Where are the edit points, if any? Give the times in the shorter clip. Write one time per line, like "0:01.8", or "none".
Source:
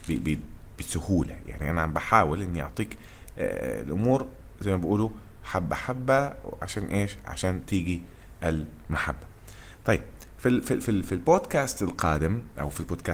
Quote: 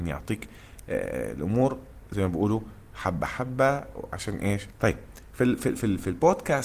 0:04.7